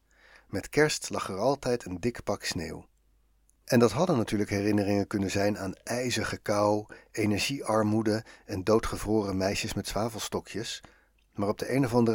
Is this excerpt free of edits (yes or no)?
yes